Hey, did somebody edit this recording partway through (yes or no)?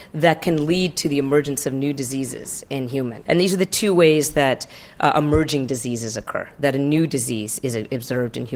yes